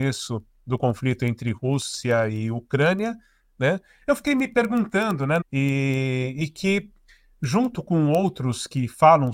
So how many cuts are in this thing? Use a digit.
2